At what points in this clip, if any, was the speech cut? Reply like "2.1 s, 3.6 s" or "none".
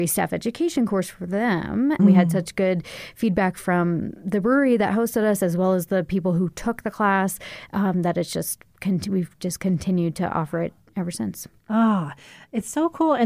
2.0 s

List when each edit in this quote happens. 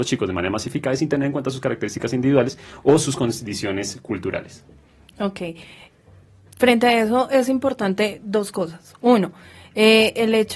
none

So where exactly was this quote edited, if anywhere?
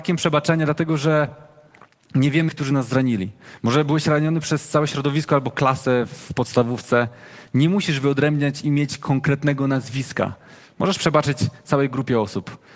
2.5 s

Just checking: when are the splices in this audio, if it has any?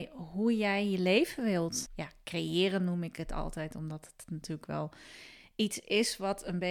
1.9 s

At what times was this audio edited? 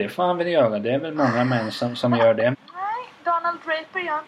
2.5 s

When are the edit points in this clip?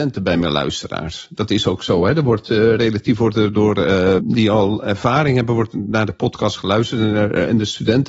4.2 s

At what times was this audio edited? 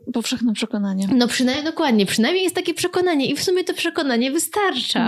none

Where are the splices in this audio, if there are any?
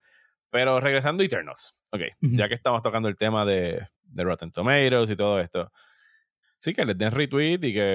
3.9 s, 6.4 s

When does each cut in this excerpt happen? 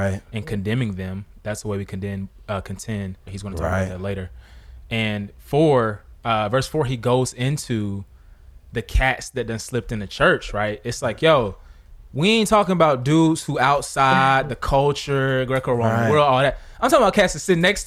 3.3 s

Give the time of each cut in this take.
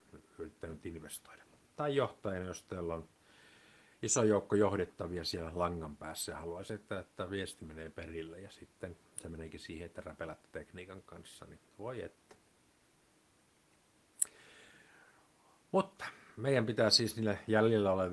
none

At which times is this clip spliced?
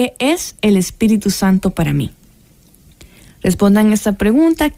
none

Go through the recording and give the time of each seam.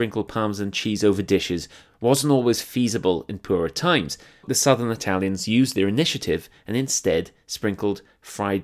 4.4 s

